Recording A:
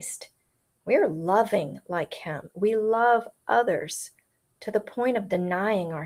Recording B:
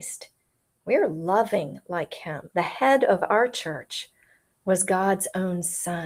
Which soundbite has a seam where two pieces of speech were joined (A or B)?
B